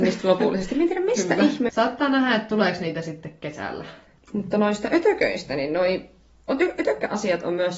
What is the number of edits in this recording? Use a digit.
2